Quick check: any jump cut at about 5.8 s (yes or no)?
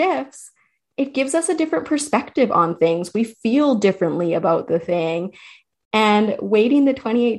no